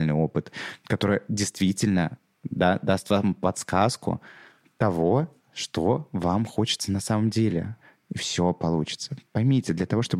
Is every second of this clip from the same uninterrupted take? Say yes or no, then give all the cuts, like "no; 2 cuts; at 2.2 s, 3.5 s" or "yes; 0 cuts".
yes; 0 cuts